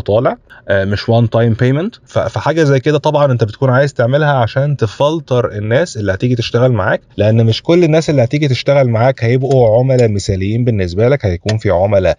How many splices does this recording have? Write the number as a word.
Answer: one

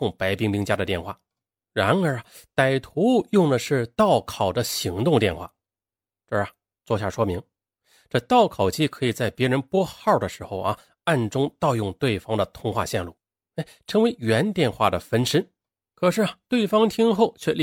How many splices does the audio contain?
one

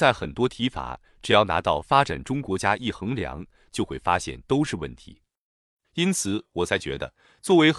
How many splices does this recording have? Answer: zero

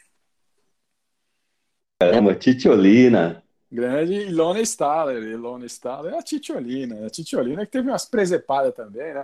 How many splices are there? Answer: zero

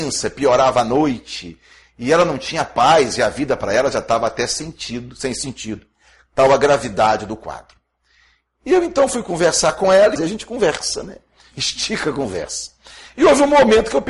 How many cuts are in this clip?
one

